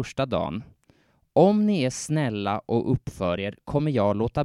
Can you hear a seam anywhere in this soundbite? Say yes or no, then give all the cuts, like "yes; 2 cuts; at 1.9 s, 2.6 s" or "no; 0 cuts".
no; 0 cuts